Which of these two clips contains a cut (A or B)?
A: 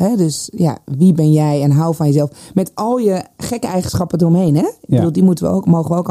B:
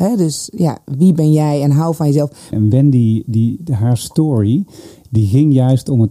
B